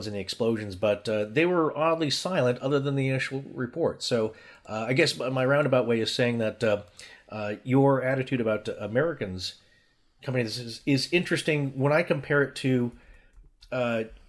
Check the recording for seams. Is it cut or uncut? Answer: uncut